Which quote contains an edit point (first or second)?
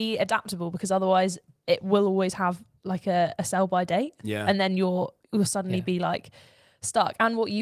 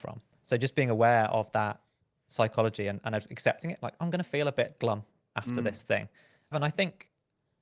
second